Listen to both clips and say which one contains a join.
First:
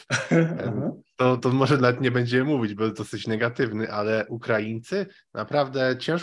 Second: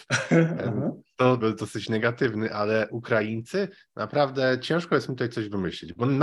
second; 1 cut; at 1.4 s

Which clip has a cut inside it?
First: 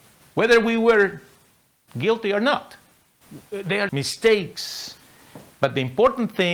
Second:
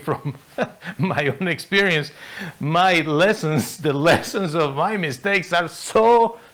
first; 1 cut; at 3.9 s

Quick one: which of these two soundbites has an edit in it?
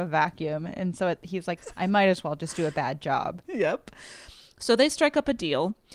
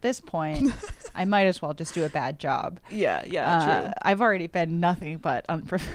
first; 2 cuts; at 1.6 s, 3.4 s

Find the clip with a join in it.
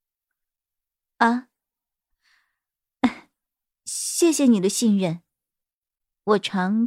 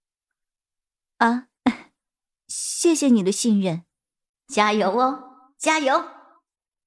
second; 2 cuts; at 1.6 s, 4.3 s

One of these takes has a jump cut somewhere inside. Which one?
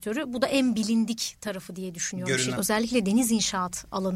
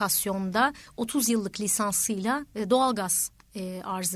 first; 1 cut; at 2.5 s

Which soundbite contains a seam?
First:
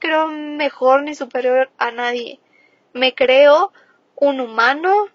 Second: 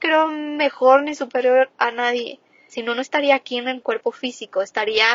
second; 1 cut; at 2.7 s

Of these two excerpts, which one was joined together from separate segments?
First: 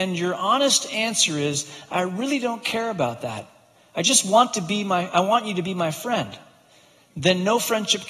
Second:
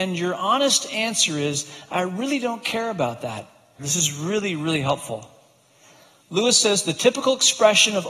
second; 1 cut; at 3.8 s

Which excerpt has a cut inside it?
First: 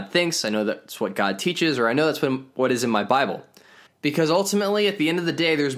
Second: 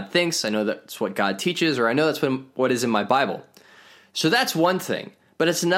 first; 1 cut; at 3.9 s

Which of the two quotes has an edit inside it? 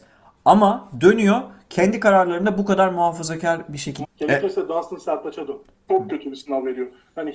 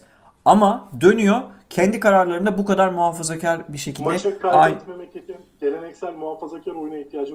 first; 2 cuts; at 4.0 s, 5.9 s

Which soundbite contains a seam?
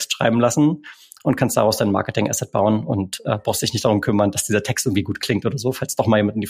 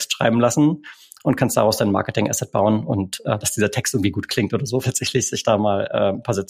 second; 2 cuts; at 3.4 s, 4.8 s

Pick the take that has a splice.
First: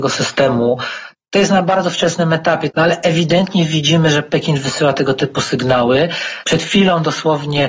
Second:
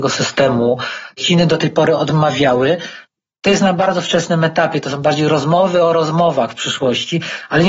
first; 2 cuts; at 1.1 s, 2.7 s

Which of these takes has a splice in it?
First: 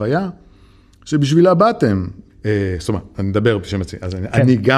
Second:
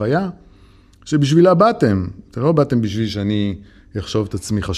first; 1 cut; at 2.3 s

